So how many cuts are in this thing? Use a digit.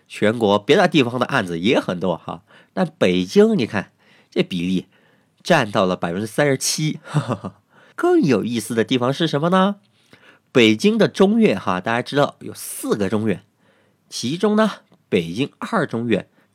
1